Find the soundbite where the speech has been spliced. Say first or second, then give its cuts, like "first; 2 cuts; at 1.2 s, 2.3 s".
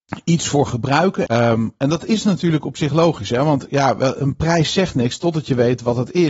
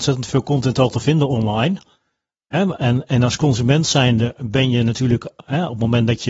first; 1 cut; at 1.3 s